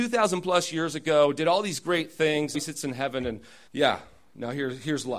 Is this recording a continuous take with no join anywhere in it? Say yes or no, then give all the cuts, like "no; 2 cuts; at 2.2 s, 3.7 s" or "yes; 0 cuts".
no; 2 cuts; at 2.5 s, 3.7 s